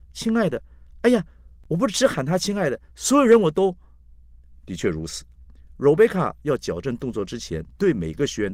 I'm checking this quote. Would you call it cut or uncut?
uncut